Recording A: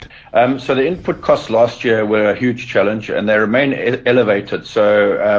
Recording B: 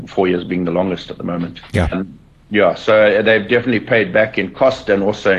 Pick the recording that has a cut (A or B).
B